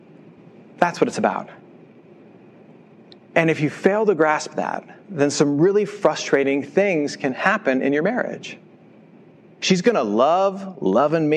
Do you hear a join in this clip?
yes; 2 cuts; at 5.0 s, 9.6 s

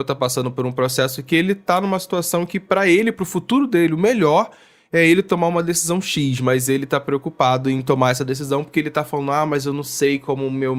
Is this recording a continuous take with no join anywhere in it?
yes; 0 cuts

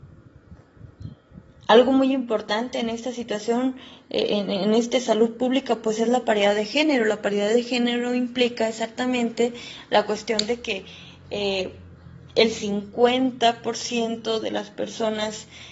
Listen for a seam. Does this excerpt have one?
no; 0 cuts

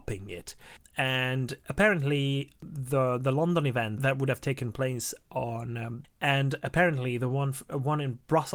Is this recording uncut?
no; 1 cut; at 6.0 s

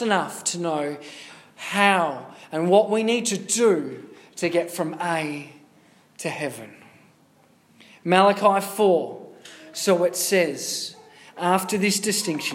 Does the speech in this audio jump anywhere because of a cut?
no; 0 cuts

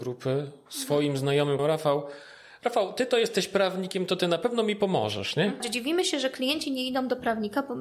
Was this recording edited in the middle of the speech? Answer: yes; 2 cuts; at 1.6 s, 5.6 s

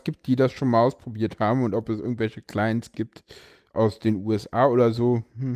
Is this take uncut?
yes; 0 cuts

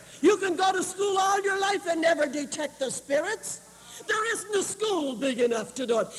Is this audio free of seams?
no; 1 cut; at 4.0 s

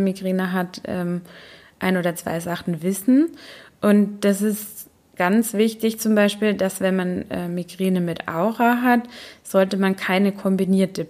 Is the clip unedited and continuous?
yes; 0 cuts

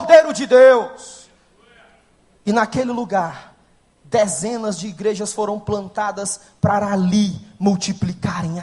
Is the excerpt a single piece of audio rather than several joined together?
yes; 0 cuts

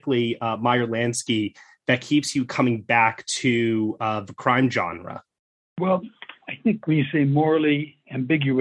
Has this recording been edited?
no; 0 cuts

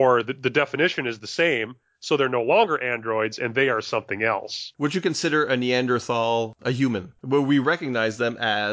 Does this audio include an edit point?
yes; 1 cut; at 7.2 s

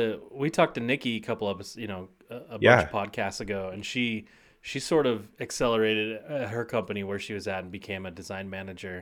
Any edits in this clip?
no; 0 cuts

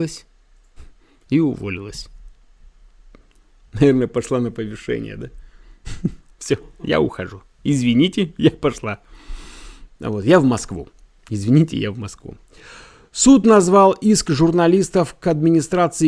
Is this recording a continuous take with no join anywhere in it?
yes; 0 cuts

